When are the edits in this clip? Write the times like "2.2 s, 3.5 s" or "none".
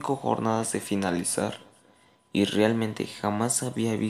none